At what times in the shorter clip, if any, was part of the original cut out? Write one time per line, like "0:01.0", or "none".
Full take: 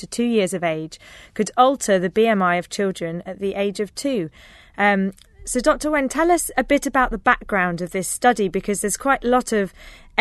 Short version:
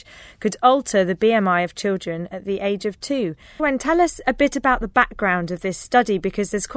0:03.6